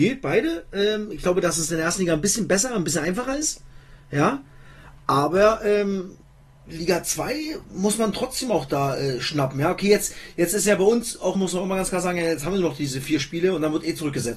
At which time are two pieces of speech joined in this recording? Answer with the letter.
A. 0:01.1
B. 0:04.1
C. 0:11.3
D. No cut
C